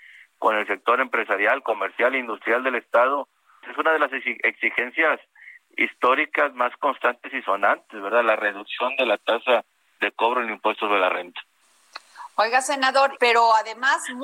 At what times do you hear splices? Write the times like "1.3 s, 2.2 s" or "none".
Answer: 3.6 s, 13.2 s

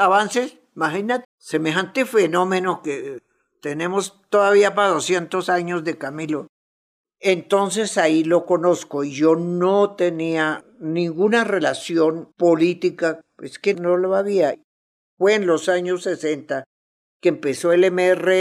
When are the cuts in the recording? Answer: 1.2 s, 12.3 s

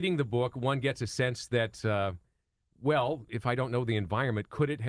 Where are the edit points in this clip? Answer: none

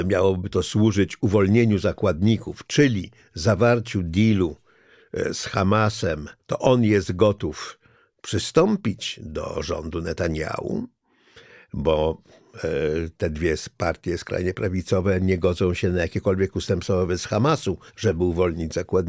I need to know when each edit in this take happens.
6.4 s, 17.9 s

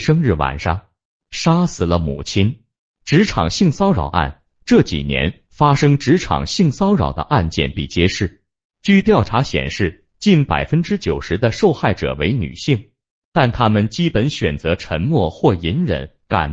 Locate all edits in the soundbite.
7.7 s, 10.1 s

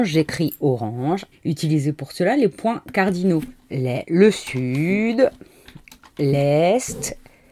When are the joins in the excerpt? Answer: 1.3 s, 3.6 s

